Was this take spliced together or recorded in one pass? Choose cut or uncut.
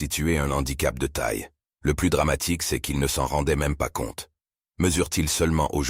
cut